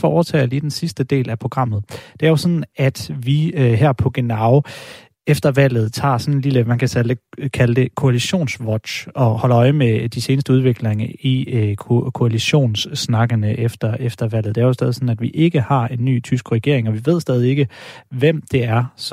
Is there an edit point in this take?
no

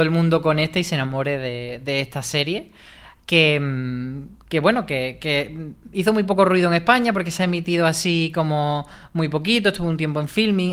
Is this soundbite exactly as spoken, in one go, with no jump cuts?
yes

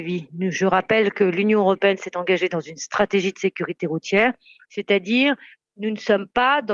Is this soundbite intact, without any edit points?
no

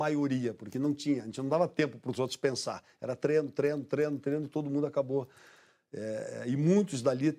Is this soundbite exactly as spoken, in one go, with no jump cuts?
yes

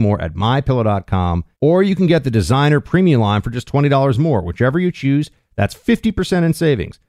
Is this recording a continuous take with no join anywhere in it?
no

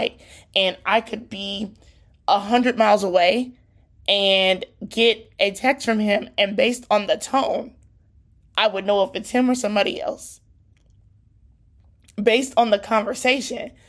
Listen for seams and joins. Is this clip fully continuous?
yes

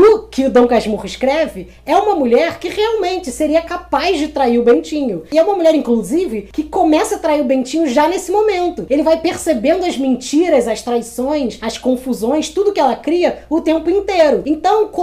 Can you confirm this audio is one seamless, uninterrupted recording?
yes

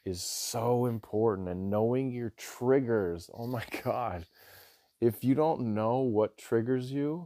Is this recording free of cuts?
yes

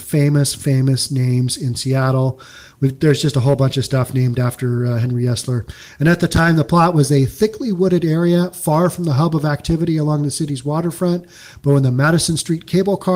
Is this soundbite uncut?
yes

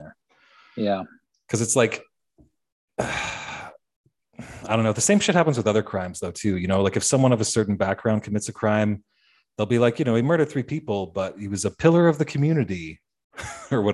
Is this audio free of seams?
yes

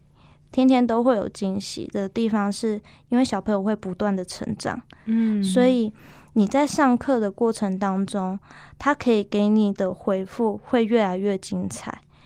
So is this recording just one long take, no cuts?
yes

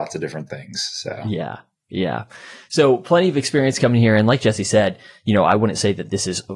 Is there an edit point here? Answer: no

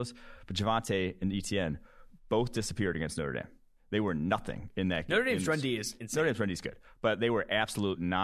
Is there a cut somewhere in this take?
no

